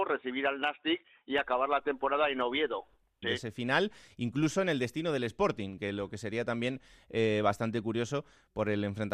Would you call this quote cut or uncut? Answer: cut